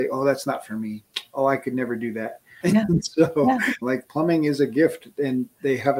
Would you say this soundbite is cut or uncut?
cut